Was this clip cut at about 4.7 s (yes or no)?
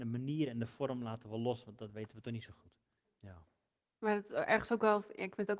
no